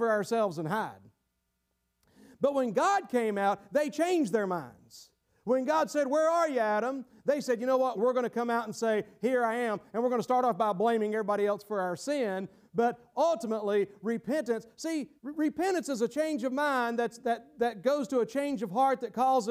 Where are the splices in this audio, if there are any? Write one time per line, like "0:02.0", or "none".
0:08.0
0:15.2